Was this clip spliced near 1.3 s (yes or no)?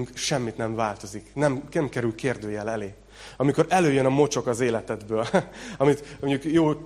no